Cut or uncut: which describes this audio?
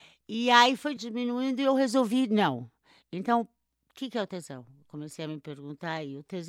cut